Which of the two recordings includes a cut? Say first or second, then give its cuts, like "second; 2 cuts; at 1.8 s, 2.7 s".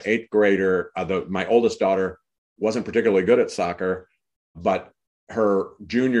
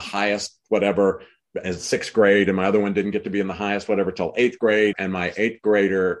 second; 1 cut; at 4.9 s